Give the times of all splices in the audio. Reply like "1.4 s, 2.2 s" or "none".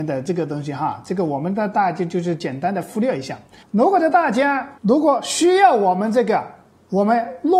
3.6 s, 4.8 s